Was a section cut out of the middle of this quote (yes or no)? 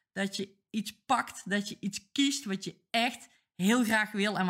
no